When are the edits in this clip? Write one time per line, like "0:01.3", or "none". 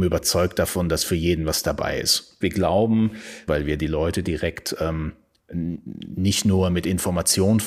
0:02.4
0:03.5

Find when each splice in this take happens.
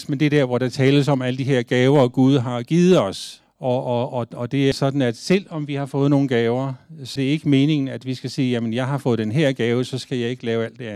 0:03.4
0:04.7
0:07.2

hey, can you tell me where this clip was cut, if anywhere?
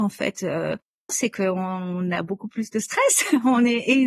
0:01.1

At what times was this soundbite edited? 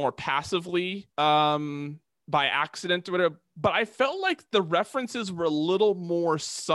0:01.1

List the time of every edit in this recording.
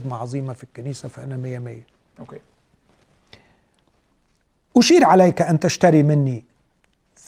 none

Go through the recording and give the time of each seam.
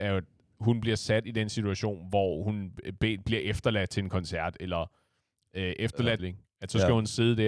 0:06.2

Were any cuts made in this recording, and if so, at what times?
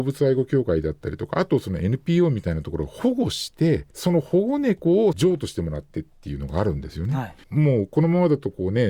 0:03.9
0:07.4

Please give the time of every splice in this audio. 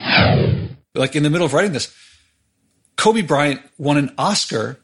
0:01.0

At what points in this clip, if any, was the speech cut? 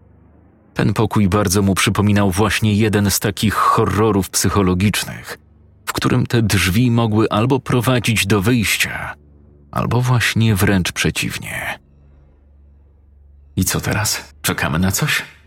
0:14.3

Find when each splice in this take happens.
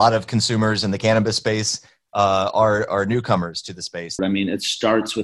0:04.2

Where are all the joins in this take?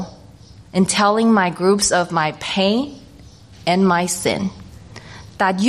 0:03.5

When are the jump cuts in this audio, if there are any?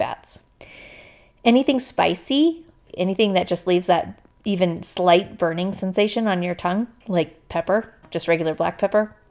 none

